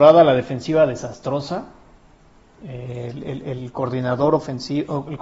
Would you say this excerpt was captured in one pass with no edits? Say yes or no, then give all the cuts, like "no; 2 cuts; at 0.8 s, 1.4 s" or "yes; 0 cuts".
yes; 0 cuts